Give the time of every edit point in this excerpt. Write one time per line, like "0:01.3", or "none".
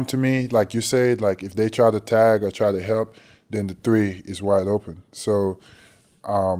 none

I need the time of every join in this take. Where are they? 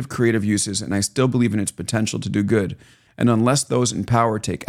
0:03.1

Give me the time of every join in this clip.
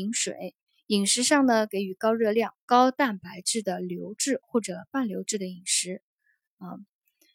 0:02.6

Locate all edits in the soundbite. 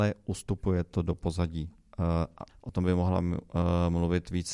0:02.5

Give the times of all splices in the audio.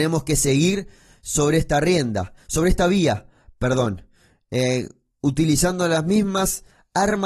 none

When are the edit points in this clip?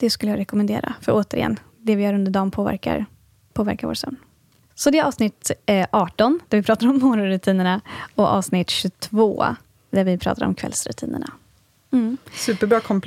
none

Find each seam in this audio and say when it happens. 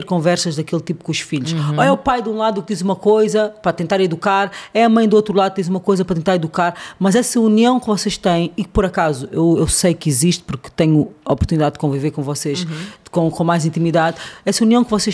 none

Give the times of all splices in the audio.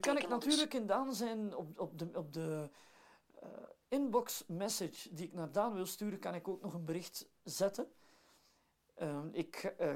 0:07.3

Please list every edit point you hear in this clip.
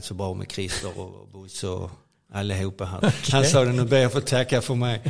0:03.0

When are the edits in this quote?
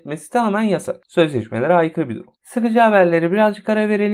0:02.3

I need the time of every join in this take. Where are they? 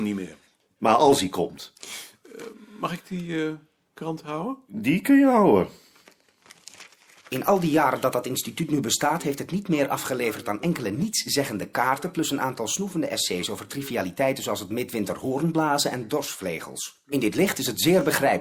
none

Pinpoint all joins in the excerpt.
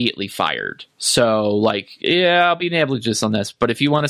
none

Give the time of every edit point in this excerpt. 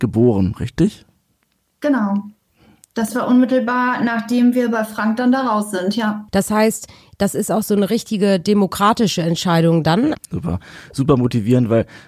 0:06.3
0:10.1

